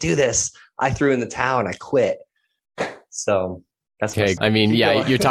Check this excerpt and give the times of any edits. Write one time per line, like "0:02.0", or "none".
0:04.4